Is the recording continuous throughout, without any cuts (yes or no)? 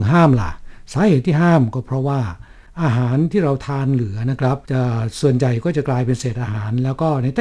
no